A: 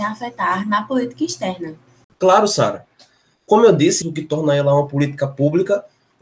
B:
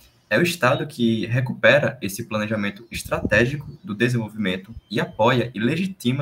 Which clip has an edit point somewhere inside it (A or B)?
A